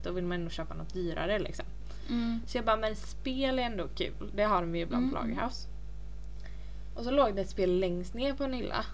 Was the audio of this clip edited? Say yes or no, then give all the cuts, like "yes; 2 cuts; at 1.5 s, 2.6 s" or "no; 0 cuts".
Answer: no; 0 cuts